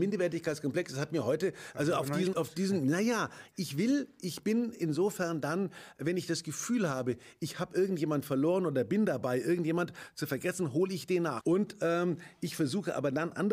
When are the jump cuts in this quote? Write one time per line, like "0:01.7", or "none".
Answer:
0:02.3
0:11.4